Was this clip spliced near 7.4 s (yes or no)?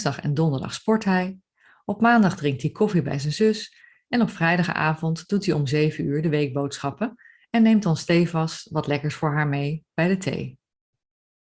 no